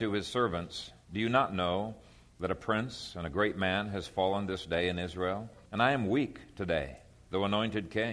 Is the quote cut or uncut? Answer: cut